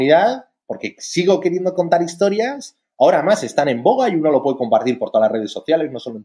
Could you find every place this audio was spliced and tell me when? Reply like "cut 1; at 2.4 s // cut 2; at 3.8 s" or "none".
none